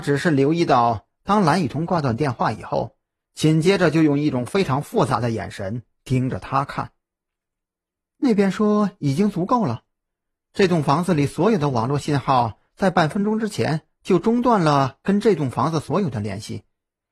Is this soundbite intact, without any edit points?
yes; 0 cuts

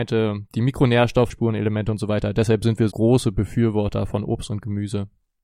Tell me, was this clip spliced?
yes; 2 cuts; at 1.3 s, 2.9 s

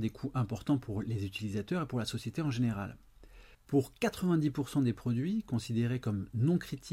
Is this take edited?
yes; 1 cut; at 3.5 s

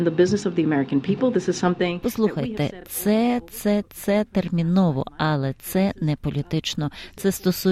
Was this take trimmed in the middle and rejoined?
no; 0 cuts

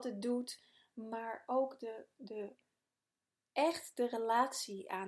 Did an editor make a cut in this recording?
no; 0 cuts

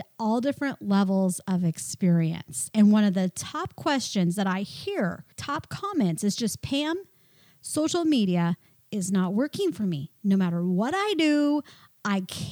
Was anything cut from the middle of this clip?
yes; 1 cut; at 5.3 s

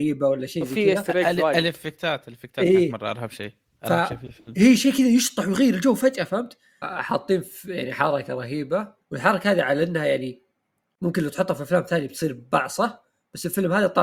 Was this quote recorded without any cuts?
no; 2 cuts; at 6.8 s, 9.0 s

